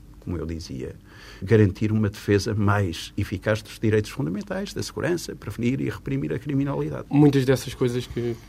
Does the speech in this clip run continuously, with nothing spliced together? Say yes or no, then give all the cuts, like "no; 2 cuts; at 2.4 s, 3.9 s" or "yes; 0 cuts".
no; 2 cuts; at 1.4 s, 7.1 s